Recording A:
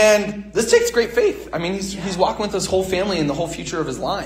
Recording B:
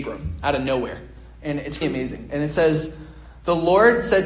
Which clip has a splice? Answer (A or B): B